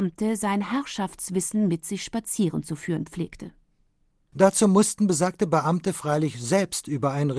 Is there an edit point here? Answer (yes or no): yes